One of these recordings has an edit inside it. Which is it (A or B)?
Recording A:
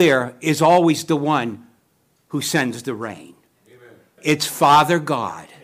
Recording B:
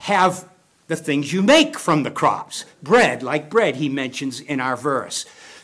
A